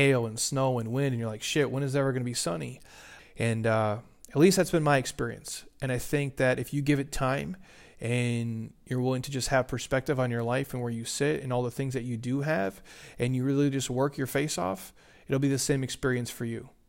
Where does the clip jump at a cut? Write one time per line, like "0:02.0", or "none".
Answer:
0:03.2